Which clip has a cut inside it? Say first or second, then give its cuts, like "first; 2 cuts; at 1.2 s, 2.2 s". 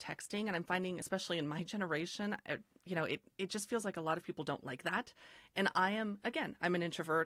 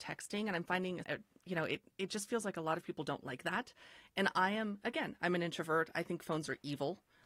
second; 1 cut; at 1.0 s